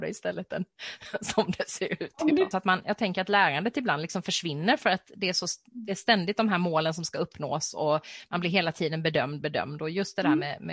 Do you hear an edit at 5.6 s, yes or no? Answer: no